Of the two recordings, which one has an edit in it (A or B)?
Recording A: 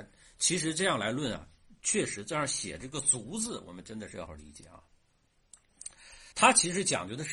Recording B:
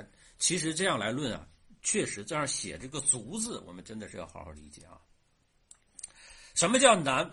A